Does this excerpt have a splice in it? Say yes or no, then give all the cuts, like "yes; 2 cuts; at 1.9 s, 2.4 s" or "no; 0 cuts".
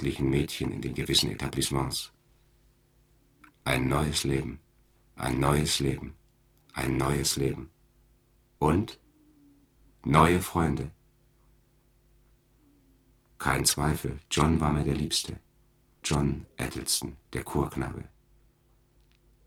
yes; 2 cuts; at 16.0 s, 17.2 s